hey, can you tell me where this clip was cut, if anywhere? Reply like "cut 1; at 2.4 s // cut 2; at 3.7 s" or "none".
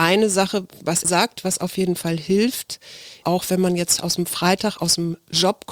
cut 1; at 1.0 s // cut 2; at 3.2 s